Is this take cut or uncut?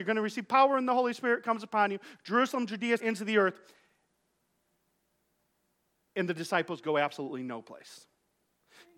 cut